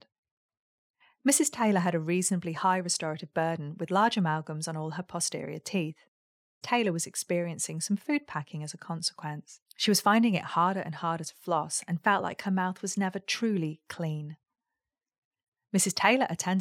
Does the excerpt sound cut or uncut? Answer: cut